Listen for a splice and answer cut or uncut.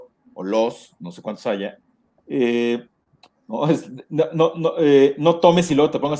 uncut